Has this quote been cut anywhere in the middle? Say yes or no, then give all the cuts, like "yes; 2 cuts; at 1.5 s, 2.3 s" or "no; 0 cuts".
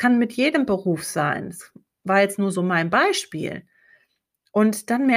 no; 0 cuts